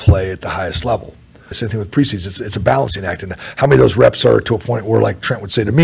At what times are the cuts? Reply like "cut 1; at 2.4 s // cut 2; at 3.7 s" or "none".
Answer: cut 1; at 1.5 s